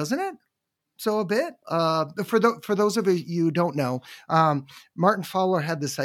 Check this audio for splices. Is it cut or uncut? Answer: cut